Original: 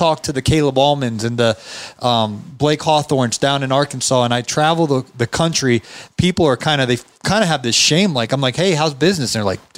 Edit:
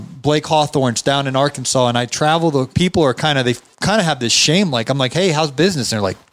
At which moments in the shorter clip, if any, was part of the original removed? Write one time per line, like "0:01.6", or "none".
0:02.7